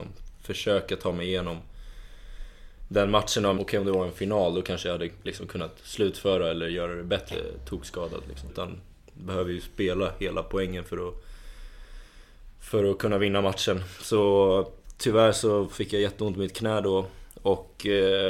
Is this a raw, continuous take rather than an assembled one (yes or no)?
no